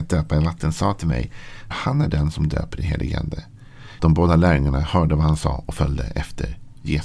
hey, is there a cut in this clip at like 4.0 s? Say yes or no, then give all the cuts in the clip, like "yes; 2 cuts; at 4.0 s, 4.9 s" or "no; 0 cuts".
yes; 2 cuts; at 1.7 s, 4.0 s